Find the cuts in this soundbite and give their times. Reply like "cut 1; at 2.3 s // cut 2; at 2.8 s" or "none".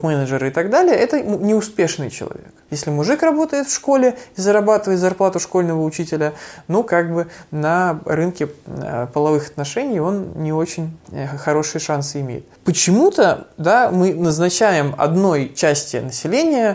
cut 1; at 2.7 s